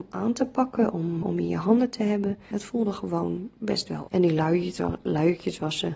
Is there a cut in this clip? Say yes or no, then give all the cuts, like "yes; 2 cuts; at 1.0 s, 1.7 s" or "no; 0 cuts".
yes; 3 cuts; at 1.2 s, 2.5 s, 4.1 s